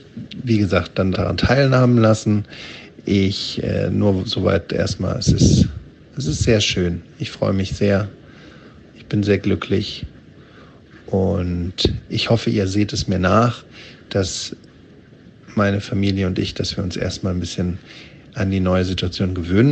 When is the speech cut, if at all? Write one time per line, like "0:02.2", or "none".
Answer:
0:01.1